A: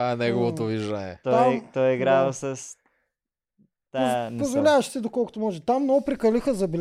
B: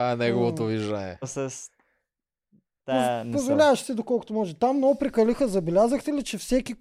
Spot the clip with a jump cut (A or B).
B